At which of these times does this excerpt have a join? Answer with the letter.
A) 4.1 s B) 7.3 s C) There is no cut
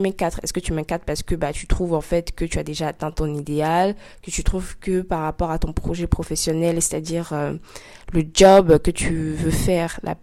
C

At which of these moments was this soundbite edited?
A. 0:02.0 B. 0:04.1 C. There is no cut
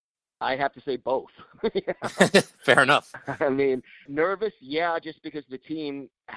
B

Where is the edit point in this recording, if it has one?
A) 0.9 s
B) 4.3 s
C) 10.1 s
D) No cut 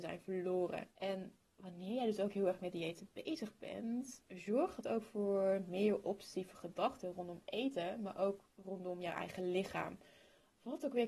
A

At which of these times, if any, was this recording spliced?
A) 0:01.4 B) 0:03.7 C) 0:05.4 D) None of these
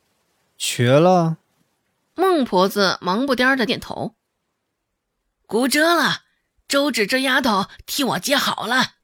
B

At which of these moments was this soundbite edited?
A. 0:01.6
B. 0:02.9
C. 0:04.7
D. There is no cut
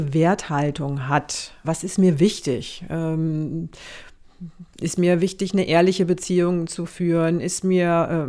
A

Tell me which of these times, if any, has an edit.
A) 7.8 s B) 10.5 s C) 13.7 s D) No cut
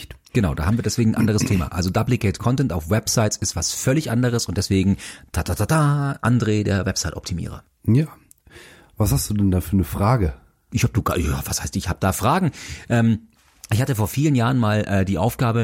D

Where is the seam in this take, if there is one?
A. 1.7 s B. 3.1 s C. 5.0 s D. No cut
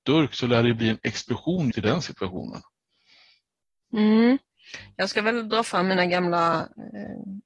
A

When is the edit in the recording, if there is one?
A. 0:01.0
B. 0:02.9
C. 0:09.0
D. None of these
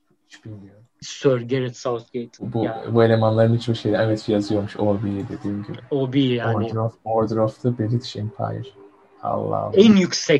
A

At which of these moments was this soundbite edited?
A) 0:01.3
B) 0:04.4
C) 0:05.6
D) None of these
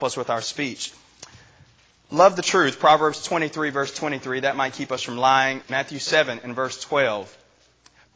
C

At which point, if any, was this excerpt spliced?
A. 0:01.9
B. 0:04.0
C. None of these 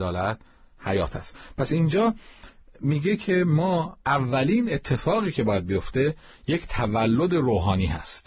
B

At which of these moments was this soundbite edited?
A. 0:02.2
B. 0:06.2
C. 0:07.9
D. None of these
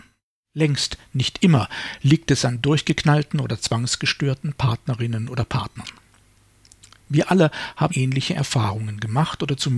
C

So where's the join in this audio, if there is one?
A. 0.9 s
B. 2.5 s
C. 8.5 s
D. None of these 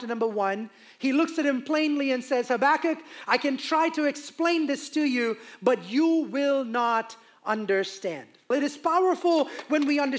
C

